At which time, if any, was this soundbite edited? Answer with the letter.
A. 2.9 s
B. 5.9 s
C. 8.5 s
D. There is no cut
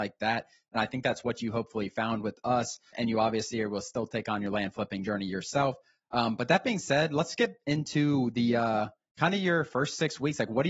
A